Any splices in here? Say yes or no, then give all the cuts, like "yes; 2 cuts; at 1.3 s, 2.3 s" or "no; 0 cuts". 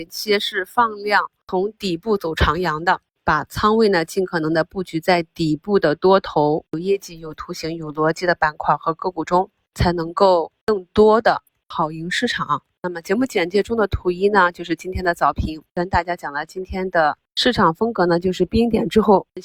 no; 0 cuts